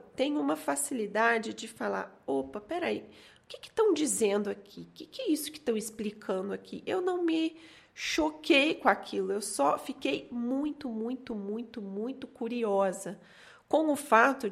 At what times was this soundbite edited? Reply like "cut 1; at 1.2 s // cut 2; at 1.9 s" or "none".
none